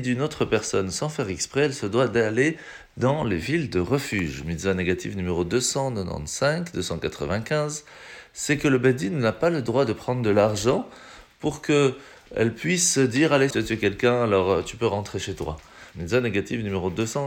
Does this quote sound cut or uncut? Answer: cut